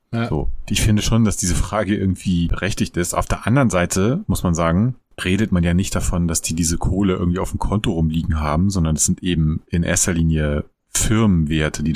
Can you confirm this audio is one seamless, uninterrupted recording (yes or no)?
no